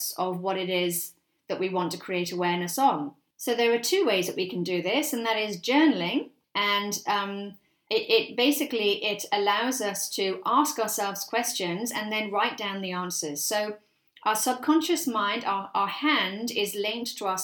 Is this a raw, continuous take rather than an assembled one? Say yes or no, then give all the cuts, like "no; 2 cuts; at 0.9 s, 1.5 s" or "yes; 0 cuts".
yes; 0 cuts